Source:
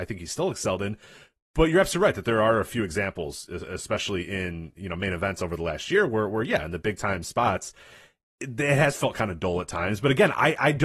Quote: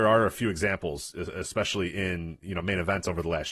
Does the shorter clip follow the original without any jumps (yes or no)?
yes